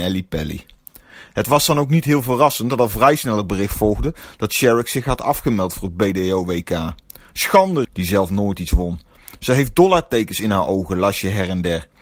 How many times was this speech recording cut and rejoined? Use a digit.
1